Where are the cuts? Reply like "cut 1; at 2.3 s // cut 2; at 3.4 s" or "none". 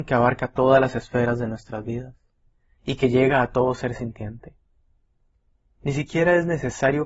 none